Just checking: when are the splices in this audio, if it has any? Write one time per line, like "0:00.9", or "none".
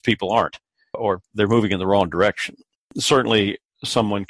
0:00.9
0:02.7